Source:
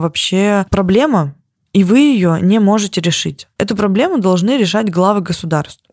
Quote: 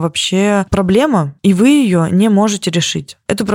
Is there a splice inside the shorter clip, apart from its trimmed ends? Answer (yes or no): yes